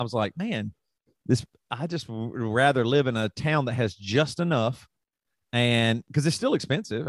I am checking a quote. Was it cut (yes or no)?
no